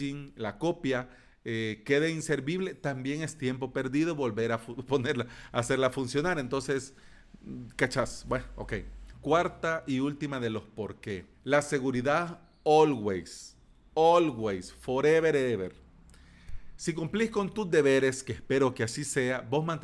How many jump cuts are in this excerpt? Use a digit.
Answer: 2